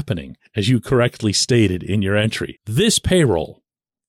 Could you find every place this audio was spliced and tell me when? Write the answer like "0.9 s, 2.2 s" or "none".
2.6 s